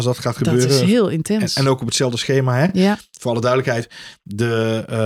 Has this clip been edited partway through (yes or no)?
no